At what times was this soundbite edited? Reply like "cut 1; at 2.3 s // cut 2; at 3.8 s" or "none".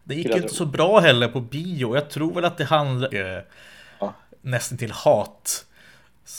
cut 1; at 3.1 s